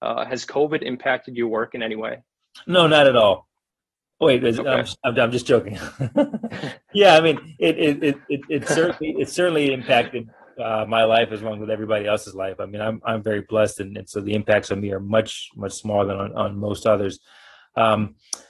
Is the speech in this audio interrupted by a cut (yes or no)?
no